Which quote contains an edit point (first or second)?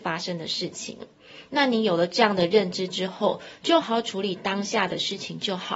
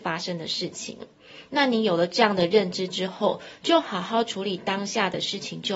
first